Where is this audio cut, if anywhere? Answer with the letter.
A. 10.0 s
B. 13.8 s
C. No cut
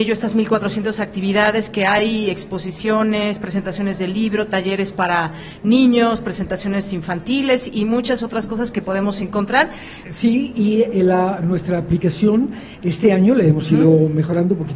A